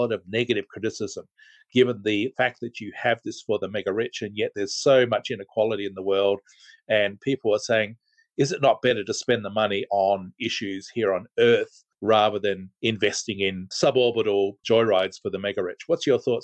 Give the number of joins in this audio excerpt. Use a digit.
1